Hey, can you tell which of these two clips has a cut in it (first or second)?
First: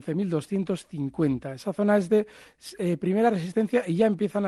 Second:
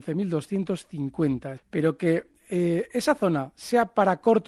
second